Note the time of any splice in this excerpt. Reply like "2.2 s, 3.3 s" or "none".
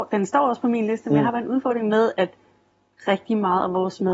none